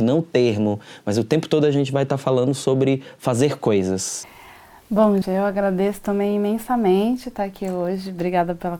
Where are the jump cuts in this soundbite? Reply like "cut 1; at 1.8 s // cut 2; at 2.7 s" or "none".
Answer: cut 1; at 5.2 s